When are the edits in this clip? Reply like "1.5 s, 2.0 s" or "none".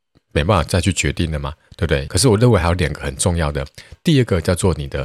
2.1 s